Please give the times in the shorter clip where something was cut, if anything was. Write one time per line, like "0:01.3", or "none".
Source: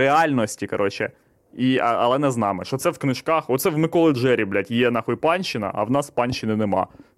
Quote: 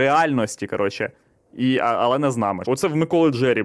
0:02.6